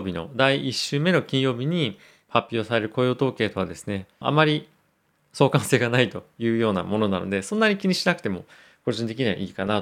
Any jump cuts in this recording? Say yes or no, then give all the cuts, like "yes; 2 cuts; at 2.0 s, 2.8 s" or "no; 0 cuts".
yes; 1 cut; at 4.2 s